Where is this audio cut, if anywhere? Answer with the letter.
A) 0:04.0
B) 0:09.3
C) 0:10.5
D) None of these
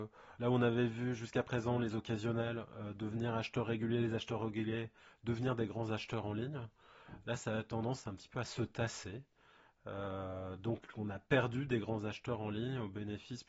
D